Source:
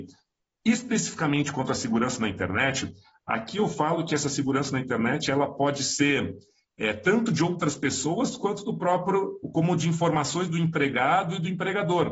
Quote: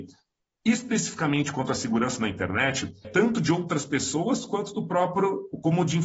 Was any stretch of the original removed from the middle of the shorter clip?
yes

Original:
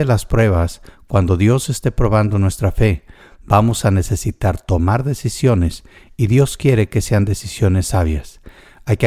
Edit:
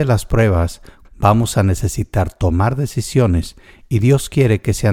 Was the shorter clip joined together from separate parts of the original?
yes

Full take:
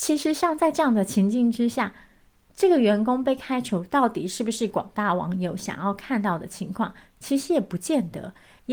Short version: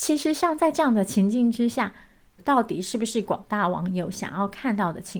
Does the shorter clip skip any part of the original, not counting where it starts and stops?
yes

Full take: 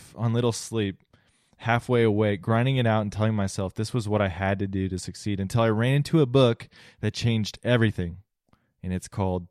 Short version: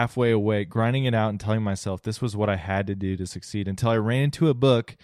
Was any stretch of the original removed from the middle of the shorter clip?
no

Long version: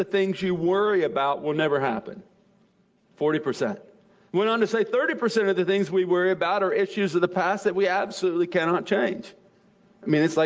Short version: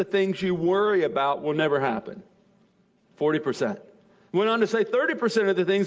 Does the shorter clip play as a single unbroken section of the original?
yes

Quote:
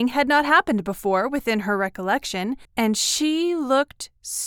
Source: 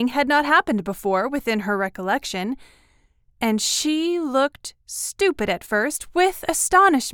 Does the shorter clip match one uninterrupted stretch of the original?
no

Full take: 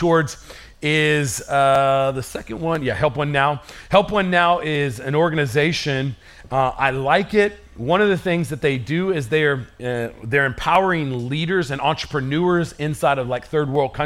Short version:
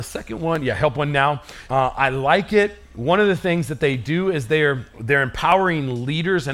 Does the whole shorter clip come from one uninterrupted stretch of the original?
no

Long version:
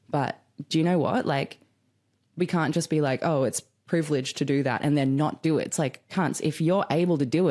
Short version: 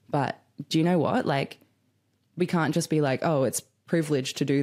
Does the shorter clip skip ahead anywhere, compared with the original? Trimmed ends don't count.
no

